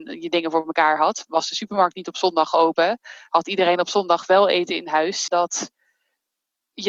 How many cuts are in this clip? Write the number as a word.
one